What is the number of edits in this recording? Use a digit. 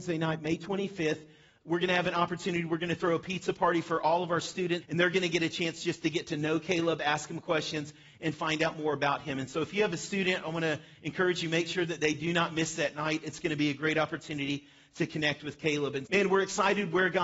2